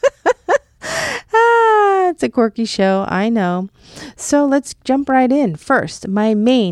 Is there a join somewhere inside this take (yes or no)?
no